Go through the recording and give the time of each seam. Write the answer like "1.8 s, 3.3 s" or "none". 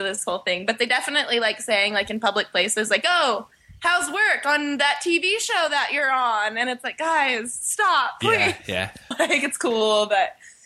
9.1 s